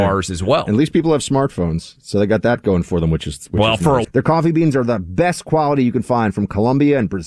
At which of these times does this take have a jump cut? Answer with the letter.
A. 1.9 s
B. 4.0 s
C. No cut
B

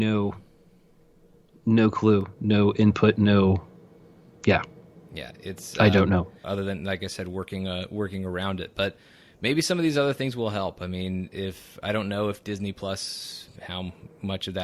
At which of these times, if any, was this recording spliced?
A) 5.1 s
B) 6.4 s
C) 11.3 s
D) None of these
B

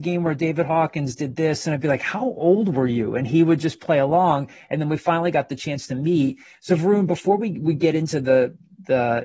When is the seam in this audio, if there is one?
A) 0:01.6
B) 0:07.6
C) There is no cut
C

